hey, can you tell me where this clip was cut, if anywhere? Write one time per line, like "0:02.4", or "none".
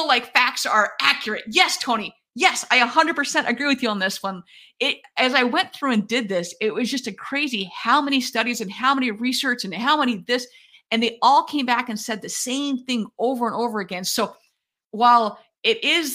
none